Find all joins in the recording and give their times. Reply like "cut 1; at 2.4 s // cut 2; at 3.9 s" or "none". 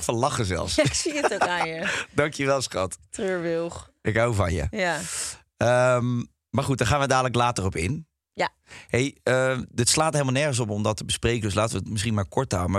none